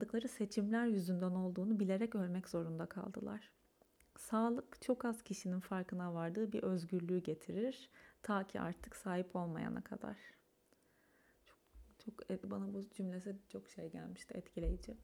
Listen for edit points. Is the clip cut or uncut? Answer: uncut